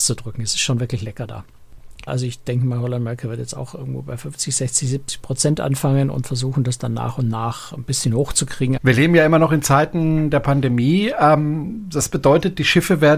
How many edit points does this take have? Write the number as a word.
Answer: two